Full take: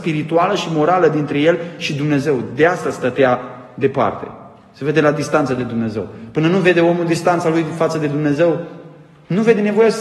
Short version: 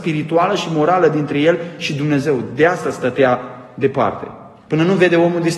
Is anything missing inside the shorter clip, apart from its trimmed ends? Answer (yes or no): yes